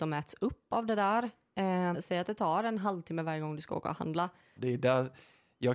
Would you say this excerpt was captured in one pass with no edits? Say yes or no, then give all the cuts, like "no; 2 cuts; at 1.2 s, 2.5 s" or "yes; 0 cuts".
no; 2 cuts; at 1.9 s, 4.6 s